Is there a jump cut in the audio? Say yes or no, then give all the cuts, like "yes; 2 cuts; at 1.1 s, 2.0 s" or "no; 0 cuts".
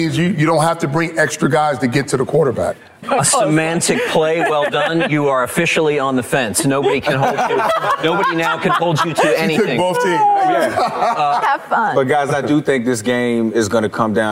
yes; 2 cuts; at 3.0 s, 11.4 s